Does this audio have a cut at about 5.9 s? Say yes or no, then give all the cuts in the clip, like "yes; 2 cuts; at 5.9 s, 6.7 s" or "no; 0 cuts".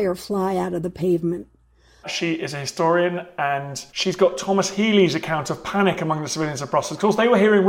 no; 2 cuts; at 2.0 s, 3.9 s